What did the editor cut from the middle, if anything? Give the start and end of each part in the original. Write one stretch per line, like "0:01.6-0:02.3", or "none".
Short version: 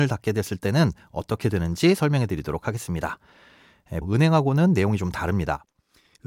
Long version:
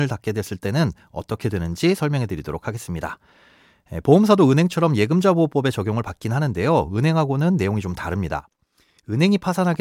0:04.0-0:06.9